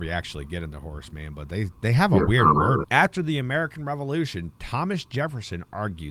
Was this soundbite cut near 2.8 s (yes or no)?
yes